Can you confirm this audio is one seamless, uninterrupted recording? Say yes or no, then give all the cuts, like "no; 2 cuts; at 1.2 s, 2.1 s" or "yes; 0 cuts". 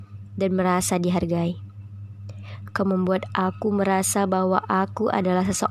yes; 0 cuts